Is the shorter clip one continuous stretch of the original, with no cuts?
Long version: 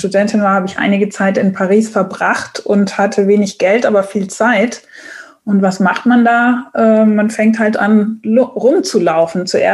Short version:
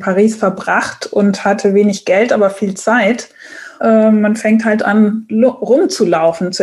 no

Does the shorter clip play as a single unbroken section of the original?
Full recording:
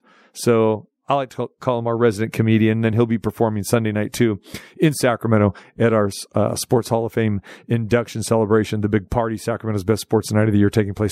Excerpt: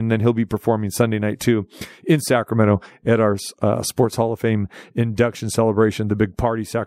yes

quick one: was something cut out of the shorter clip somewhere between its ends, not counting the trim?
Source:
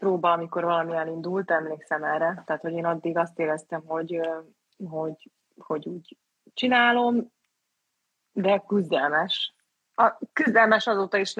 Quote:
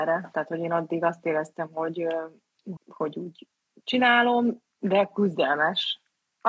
yes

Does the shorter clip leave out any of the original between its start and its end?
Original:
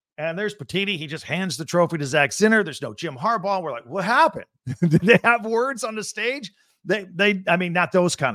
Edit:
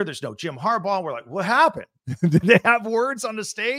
no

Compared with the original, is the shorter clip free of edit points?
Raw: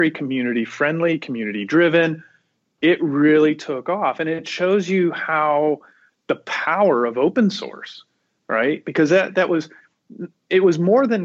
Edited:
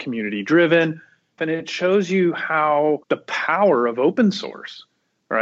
no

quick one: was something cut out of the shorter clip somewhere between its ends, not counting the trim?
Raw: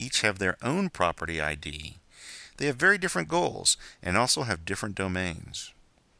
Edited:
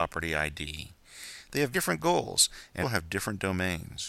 yes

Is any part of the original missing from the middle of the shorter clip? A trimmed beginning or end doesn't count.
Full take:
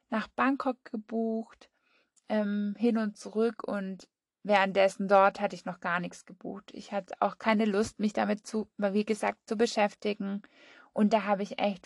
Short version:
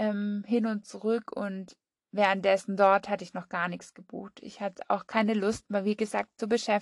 yes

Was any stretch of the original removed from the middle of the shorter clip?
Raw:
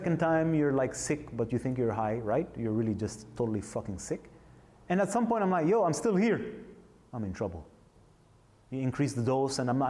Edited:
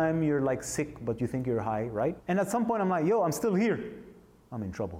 yes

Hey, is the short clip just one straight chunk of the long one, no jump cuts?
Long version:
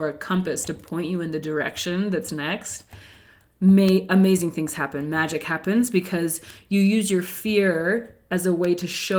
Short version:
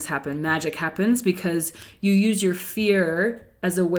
yes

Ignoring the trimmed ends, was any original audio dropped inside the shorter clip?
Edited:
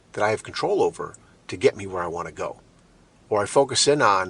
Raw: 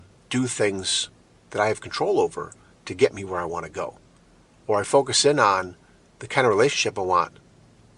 no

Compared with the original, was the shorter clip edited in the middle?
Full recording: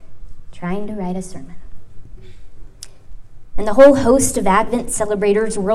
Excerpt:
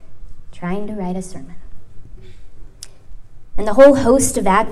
no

